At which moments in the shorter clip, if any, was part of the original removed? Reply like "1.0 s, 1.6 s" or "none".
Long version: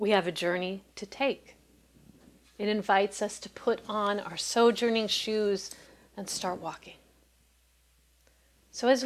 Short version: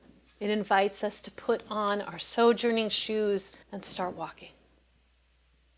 3.6 s